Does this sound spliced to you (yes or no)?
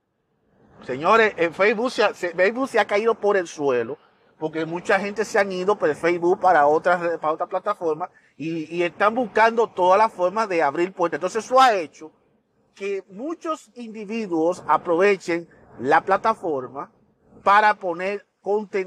no